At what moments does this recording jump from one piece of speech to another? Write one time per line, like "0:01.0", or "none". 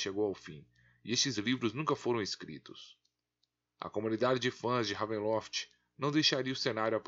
none